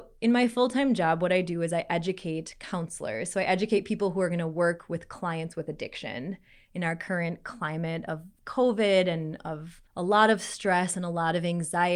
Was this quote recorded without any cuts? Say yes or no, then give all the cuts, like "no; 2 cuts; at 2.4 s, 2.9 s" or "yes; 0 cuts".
no; 2 cuts; at 6.7 s, 9.9 s